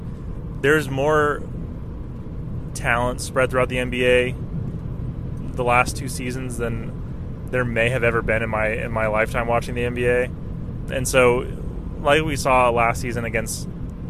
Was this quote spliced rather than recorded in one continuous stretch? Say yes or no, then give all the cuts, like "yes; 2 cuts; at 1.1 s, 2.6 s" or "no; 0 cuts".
yes; 1 cut; at 10.9 s